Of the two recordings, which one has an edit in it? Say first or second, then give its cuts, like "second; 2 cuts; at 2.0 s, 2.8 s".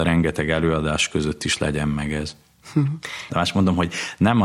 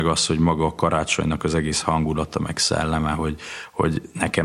first; 1 cut; at 3.3 s